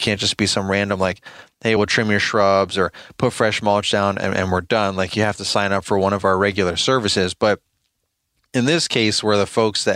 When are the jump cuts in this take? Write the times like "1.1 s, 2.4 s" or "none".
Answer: none